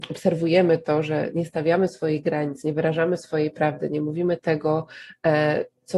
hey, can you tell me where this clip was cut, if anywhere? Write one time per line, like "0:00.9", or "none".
none